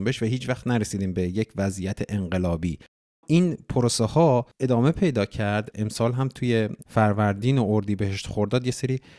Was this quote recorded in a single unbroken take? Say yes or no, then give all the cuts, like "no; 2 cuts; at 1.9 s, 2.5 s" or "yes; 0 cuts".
yes; 0 cuts